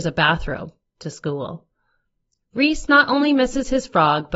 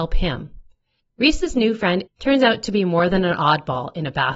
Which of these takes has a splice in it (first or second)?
second